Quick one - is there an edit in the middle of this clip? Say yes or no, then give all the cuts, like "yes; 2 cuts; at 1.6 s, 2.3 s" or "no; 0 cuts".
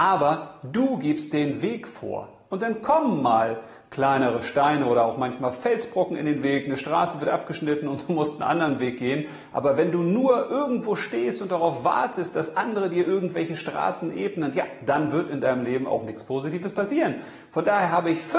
no; 0 cuts